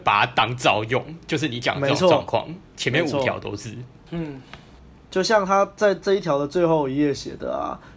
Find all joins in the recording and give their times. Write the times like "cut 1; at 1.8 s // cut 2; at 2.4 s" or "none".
none